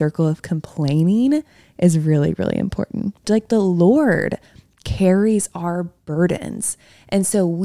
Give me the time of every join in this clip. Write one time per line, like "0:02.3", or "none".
0:03.2